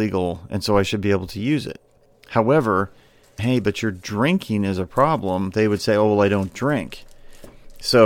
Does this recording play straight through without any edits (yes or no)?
no